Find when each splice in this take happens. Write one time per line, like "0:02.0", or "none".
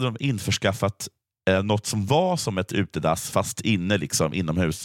none